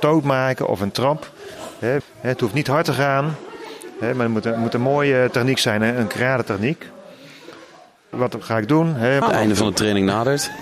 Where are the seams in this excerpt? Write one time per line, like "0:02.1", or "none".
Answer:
0:02.0
0:08.1
0:09.2